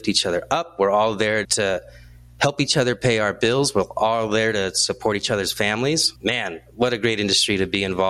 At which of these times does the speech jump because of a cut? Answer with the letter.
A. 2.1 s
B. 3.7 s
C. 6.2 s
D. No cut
C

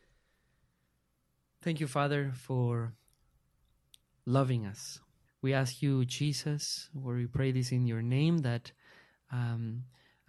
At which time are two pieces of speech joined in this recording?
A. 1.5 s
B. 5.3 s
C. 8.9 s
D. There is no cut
B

